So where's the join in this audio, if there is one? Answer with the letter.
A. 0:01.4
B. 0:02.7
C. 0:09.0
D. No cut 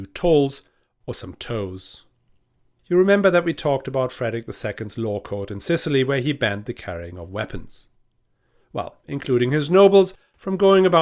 C